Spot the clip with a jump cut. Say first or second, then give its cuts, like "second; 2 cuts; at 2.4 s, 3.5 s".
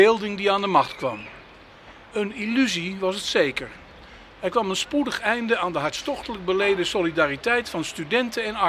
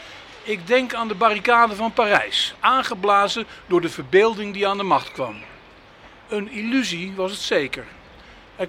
second; 1 cut; at 2.6 s